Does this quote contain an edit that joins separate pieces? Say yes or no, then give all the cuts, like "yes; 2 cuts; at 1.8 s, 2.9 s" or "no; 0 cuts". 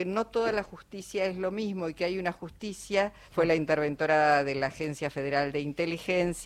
yes; 1 cut; at 3.3 s